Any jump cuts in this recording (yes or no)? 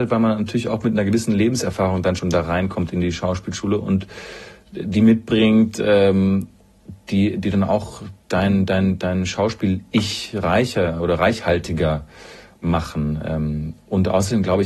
no